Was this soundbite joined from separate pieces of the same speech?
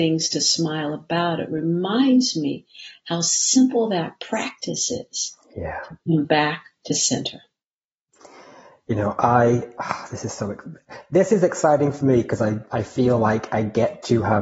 no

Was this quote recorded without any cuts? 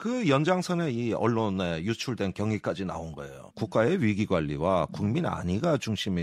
no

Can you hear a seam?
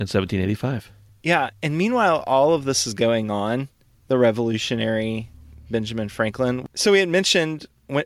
no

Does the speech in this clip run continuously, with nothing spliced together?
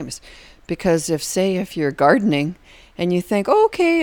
yes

